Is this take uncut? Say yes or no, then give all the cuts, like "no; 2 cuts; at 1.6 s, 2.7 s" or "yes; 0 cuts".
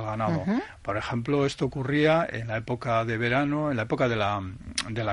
yes; 0 cuts